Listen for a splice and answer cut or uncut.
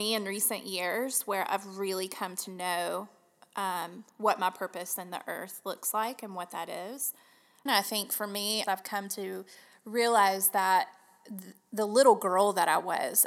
cut